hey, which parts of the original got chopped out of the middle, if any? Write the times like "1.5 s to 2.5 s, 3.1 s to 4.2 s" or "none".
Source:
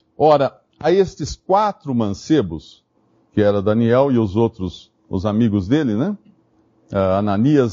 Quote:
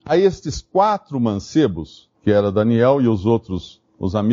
2.9 s to 3.2 s

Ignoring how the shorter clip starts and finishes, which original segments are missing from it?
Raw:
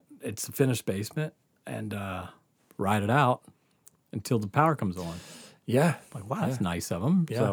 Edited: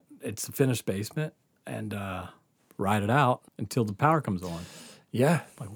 3.5 s to 4.0 s

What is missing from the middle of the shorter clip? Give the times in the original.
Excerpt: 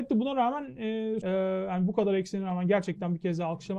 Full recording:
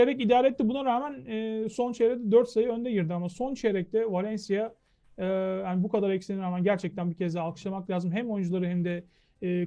1.7 s to 5.2 s

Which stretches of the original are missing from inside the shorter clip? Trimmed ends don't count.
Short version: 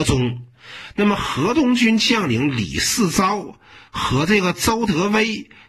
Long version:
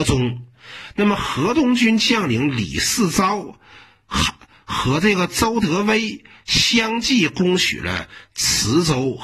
3.9 s to 4.6 s

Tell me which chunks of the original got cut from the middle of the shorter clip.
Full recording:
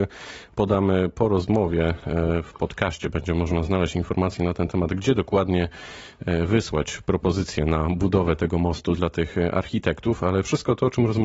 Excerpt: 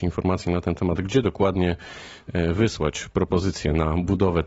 none

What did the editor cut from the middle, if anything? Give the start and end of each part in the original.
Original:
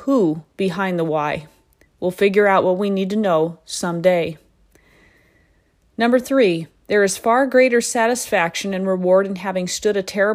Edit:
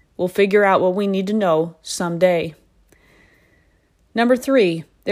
none

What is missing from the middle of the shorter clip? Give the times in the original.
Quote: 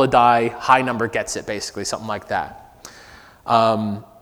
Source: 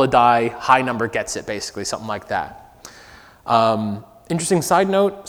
none

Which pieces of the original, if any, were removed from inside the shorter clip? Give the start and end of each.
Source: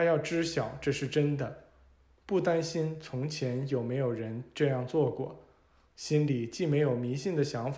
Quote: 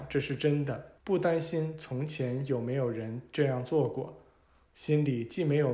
1.7 s to 2.2 s

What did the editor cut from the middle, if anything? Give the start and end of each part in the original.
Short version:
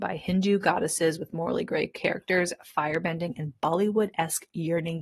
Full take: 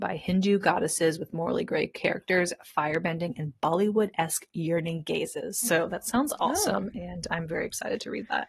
none

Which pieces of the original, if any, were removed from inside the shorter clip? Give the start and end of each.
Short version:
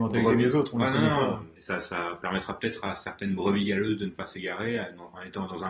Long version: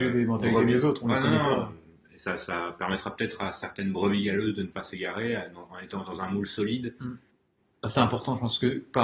1.8 s to 2.1 s

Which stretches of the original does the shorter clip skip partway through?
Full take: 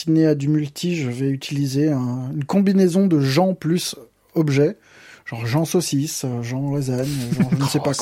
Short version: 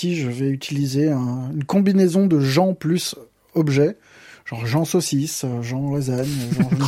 none

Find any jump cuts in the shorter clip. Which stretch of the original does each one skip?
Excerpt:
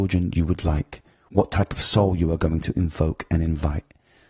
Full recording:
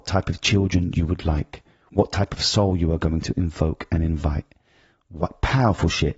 none

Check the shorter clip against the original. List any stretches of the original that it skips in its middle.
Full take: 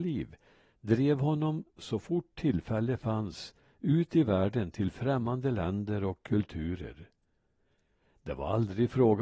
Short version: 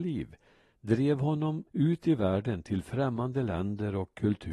1.7 s to 3.8 s

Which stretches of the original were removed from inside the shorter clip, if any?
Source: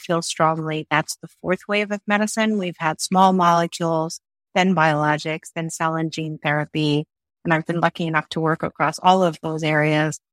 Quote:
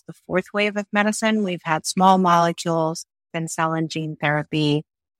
4.5 s to 5.5 s

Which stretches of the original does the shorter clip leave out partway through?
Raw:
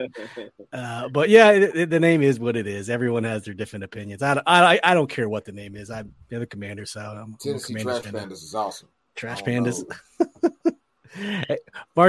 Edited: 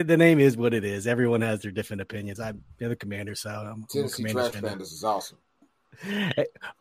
4.2 s to 5.9 s, 9.1 s to 10.7 s

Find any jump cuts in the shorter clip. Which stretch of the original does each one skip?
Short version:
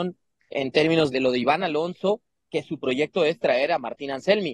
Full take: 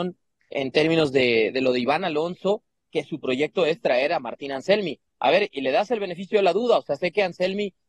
1.1 s to 1.5 s

